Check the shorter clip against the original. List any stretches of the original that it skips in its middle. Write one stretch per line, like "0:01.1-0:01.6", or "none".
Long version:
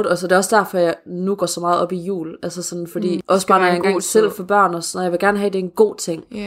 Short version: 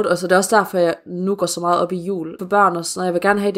0:02.4-0:04.4